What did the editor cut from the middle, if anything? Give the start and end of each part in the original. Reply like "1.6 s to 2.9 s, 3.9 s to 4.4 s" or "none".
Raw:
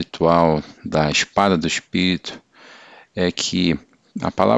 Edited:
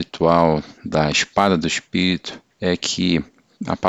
2.5 s to 3.1 s